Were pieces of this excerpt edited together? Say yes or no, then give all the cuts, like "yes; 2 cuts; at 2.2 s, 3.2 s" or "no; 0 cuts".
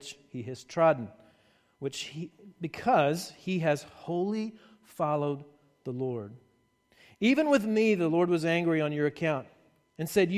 no; 0 cuts